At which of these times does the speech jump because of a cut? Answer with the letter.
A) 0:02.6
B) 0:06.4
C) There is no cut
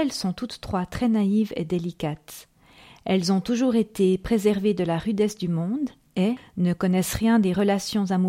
B